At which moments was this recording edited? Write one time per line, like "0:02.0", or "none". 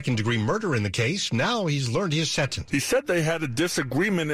0:02.7